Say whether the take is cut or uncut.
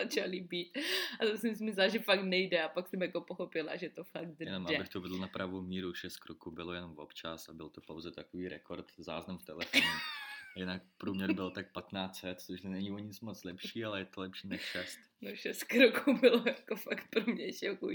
uncut